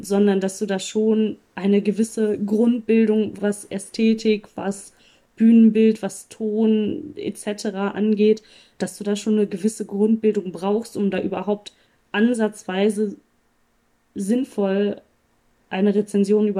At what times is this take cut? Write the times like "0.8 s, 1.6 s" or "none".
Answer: 3.4 s